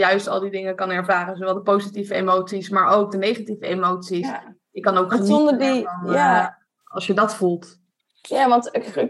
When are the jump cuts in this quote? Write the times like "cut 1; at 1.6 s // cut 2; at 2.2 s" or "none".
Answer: none